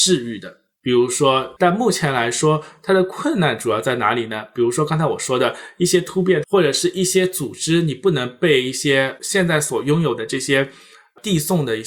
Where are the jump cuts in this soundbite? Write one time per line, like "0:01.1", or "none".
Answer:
0:01.6
0:06.4